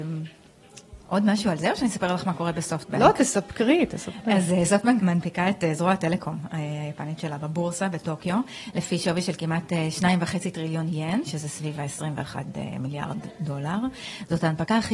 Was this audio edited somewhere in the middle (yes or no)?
yes